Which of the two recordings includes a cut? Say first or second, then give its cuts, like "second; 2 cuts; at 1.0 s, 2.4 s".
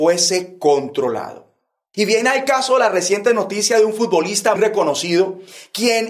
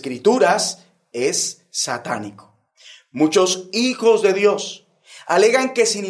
first; 2 cuts; at 1.9 s, 4.6 s